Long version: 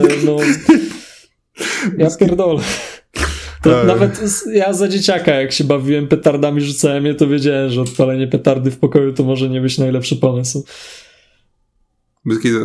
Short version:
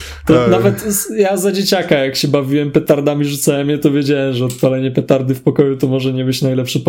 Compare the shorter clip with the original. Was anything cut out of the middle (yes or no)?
no